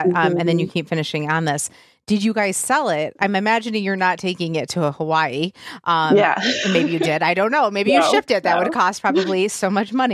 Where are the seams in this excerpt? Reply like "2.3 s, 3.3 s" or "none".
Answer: none